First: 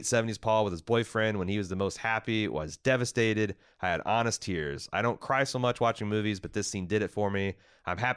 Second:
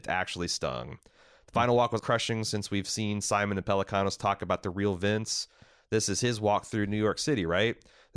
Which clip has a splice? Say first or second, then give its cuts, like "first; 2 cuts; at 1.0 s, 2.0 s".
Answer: second; 1 cut; at 2.0 s